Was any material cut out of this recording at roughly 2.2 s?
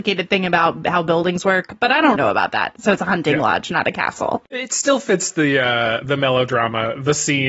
yes; 1 cut; at 2.2 s

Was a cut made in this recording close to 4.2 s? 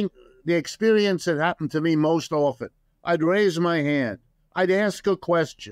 no; 0 cuts

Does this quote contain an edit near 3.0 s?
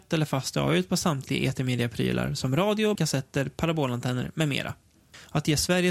yes; 1 cut; at 3.0 s

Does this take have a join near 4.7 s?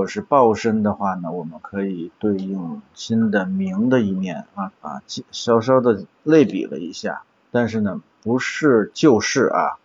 yes; 1 cut; at 4.7 s

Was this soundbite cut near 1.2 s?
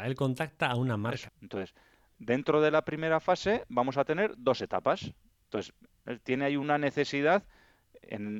yes; 2 cuts; at 1.2 s, 5.4 s

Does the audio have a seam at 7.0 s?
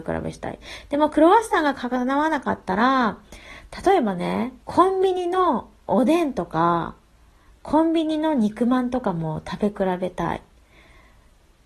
no; 1 cut; at 4.6 s

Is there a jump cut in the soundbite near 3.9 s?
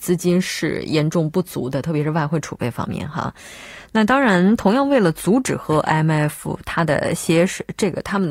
no; 0 cuts

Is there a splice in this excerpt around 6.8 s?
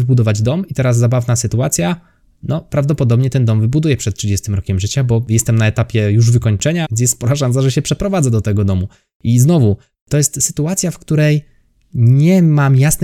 yes; 1 cut; at 6.8 s

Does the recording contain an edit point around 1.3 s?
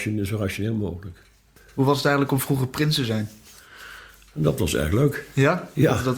no; 0 cuts

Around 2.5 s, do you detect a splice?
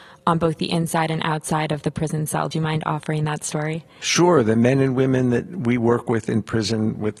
no; 0 cuts

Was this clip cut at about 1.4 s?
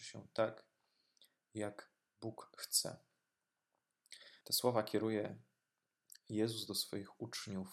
no; 1 cut; at 4.4 s

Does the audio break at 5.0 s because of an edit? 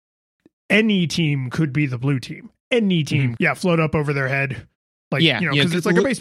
no; 1 cut; at 3.4 s

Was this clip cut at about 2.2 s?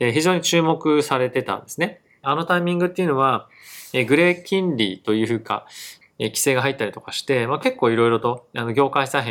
yes; 2 cuts; at 2.2 s, 6.0 s

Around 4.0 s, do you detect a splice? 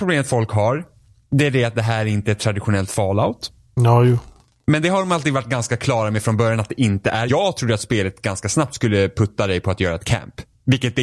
no; 1 cut; at 7.3 s

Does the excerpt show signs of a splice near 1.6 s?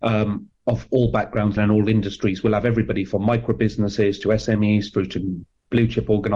yes; 1 cut; at 1.6 s

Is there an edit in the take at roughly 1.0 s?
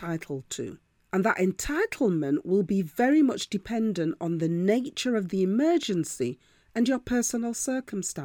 no; 0 cuts

